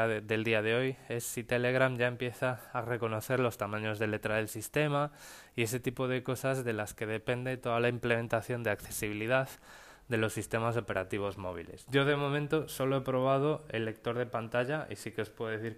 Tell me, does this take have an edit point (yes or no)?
no